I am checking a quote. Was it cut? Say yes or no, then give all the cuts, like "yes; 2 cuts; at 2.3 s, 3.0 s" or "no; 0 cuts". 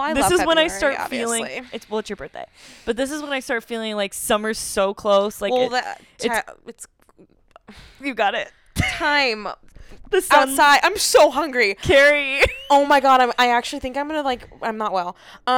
no; 0 cuts